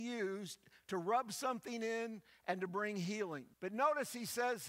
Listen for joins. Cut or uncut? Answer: cut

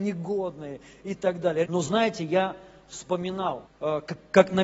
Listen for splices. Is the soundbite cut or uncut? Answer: cut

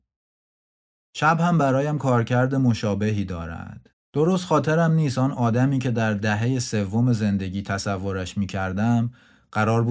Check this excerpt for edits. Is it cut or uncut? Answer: cut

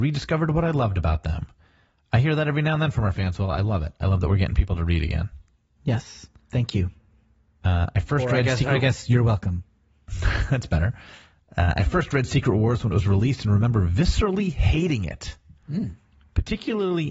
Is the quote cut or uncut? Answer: uncut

